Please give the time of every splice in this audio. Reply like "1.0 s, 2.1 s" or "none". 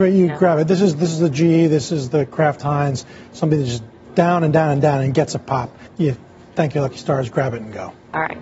5.9 s